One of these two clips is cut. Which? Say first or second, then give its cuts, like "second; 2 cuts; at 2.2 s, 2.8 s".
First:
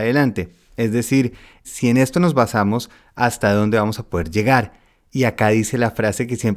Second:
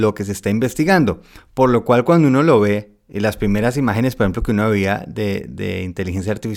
first; 1 cut; at 1.6 s